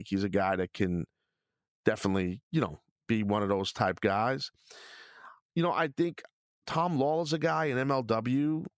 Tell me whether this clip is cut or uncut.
uncut